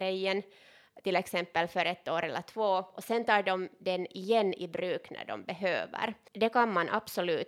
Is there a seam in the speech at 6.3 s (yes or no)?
yes